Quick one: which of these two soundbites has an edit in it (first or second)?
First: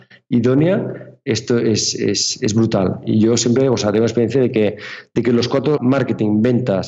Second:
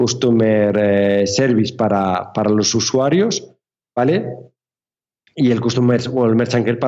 first